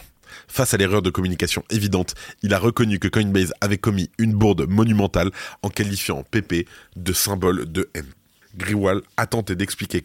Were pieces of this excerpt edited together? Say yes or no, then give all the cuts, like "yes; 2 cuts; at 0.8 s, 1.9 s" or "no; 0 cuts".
no; 0 cuts